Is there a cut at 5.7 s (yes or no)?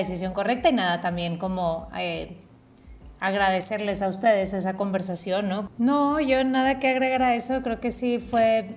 yes